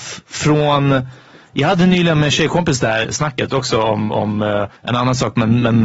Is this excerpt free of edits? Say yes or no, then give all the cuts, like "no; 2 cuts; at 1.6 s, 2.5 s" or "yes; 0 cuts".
no; 1 cut; at 4.8 s